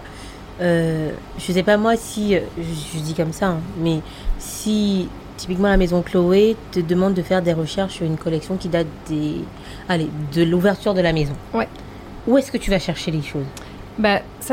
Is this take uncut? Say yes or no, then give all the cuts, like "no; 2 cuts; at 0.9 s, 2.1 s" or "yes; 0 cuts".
yes; 0 cuts